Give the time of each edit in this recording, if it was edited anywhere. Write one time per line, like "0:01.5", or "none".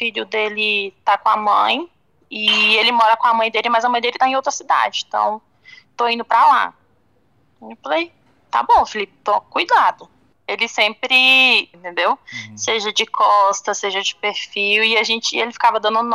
0:11.7